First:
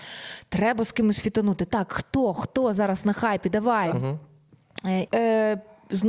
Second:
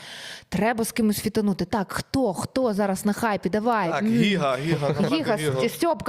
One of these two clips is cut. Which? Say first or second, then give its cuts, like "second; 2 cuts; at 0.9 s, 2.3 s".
first; 2 cuts; at 3.9 s, 5.1 s